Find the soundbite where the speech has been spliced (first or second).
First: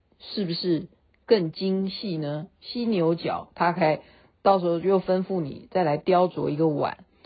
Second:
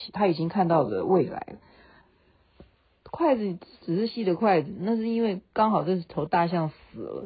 second